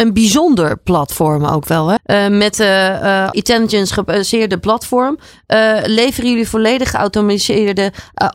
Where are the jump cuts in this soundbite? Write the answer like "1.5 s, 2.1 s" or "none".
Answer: 2.0 s, 3.3 s